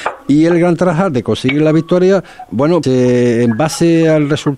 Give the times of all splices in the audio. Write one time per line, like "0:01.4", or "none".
0:02.8